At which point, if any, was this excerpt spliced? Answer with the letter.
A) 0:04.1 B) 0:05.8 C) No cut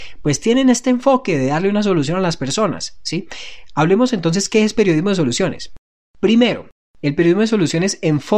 C